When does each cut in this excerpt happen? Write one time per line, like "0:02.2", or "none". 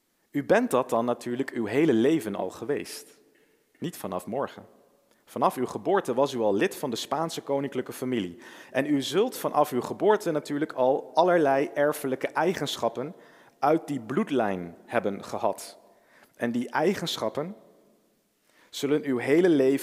none